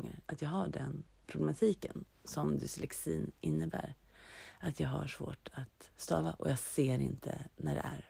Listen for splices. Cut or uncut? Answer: cut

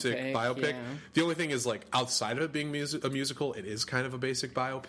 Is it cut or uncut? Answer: uncut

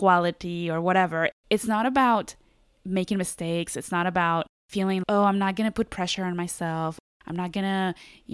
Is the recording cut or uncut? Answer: cut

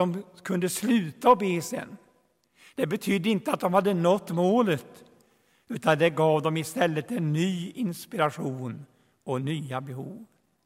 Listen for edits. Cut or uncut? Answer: uncut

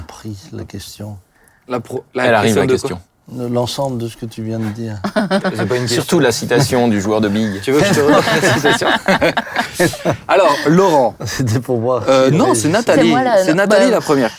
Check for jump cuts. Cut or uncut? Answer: uncut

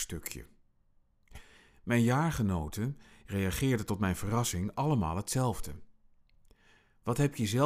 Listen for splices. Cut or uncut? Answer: uncut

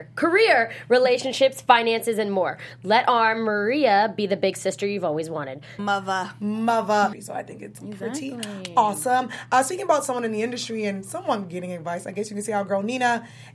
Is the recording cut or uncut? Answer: cut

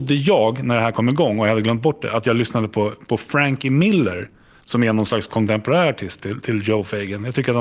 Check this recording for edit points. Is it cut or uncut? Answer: uncut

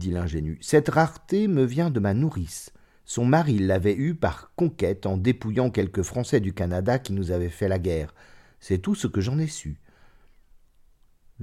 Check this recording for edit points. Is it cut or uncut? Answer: uncut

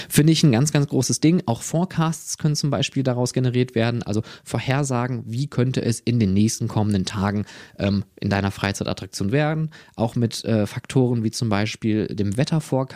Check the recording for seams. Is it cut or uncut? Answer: uncut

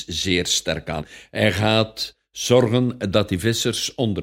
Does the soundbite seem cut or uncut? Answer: uncut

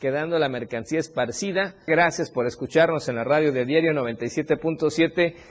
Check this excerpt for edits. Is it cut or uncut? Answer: cut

